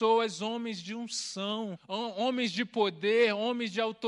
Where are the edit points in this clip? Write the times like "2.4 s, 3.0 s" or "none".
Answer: 1.8 s